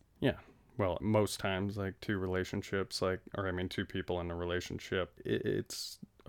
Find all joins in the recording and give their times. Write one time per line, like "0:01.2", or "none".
0:01.0
0:05.1